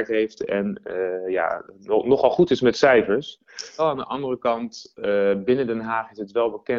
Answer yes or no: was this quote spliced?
yes